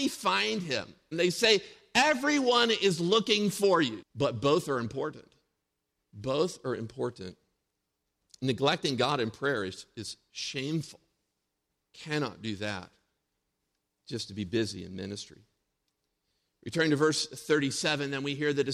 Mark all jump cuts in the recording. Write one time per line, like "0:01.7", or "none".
0:01.1
0:04.0